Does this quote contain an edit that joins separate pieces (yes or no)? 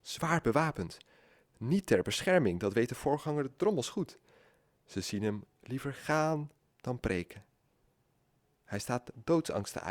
no